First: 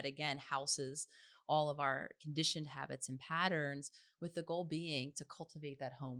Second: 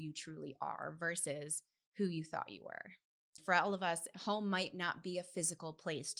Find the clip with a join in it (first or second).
second